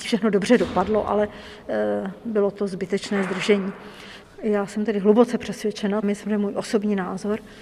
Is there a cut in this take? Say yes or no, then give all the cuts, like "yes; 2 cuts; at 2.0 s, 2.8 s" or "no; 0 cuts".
yes; 2 cuts; at 4.2 s, 6.0 s